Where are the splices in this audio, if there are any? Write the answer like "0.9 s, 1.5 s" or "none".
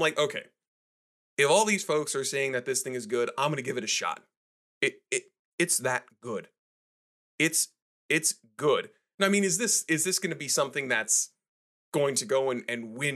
4.7 s